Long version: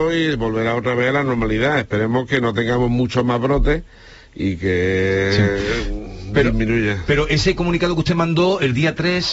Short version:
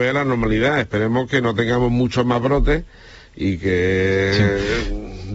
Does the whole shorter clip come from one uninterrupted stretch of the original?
yes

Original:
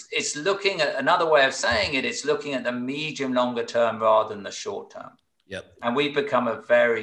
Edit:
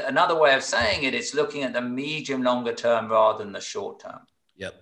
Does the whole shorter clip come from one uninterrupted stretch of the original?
yes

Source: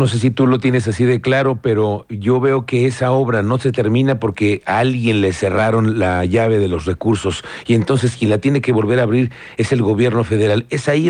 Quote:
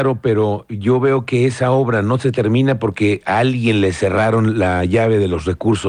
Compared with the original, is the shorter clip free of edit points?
yes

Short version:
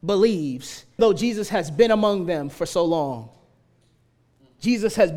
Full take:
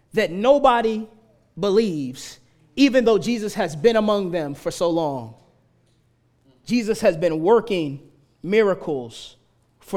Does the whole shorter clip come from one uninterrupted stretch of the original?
no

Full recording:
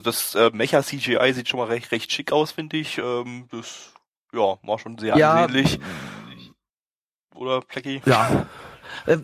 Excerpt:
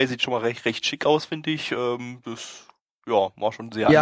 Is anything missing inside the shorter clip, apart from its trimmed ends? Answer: no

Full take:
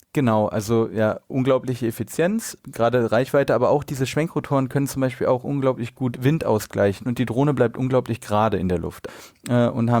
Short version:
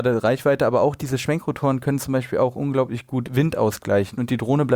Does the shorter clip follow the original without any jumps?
yes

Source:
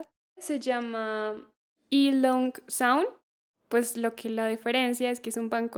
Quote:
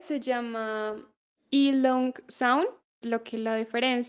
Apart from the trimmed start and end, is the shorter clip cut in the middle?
yes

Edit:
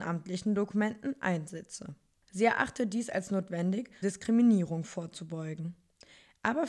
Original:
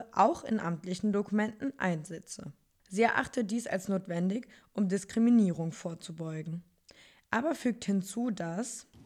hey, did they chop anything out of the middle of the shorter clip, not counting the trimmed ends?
yes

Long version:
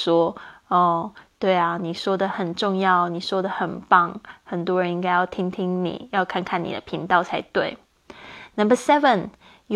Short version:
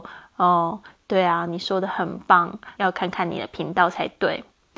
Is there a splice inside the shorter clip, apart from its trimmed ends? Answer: yes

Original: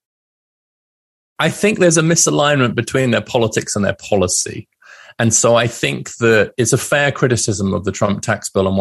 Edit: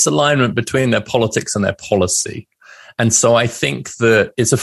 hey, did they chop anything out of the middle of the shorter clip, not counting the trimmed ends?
no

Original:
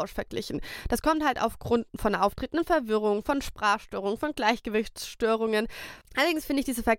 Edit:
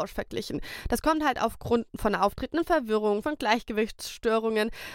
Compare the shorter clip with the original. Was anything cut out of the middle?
yes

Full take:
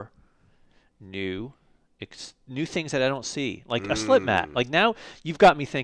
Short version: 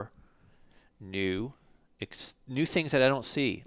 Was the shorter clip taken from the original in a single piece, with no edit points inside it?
yes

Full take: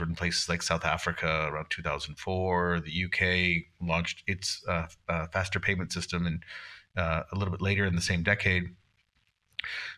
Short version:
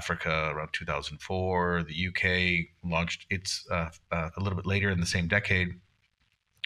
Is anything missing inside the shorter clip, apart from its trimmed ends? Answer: yes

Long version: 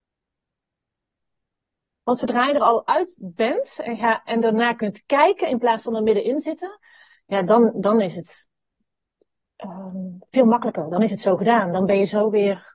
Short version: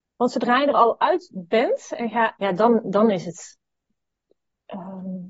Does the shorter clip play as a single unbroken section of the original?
no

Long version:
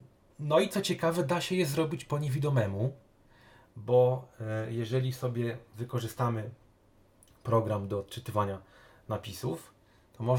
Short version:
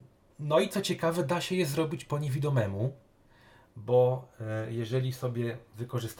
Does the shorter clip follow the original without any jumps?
yes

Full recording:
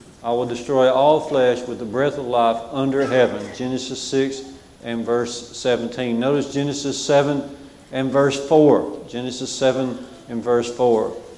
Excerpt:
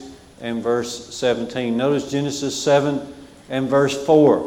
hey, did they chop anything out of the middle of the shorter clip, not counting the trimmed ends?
no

